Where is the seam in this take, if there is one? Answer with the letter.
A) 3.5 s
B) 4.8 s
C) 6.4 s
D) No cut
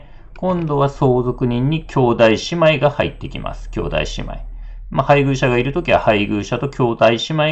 D